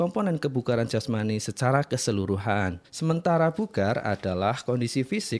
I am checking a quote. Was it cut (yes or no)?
yes